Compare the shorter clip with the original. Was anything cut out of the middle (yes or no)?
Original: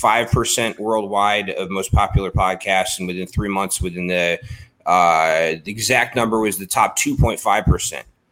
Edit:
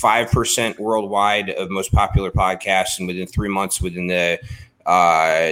no